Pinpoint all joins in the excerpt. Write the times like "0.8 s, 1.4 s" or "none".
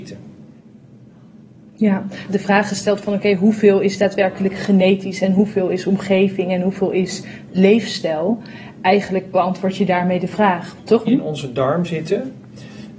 2.3 s, 11.1 s

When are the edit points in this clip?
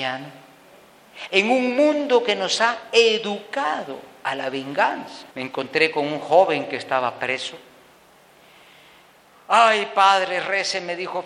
5.3 s

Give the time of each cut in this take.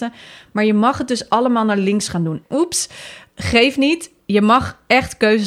2.4 s

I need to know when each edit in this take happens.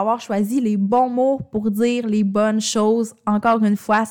none

